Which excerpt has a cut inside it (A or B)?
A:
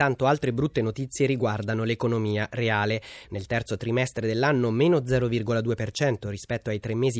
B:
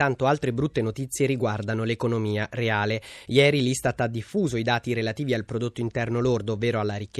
A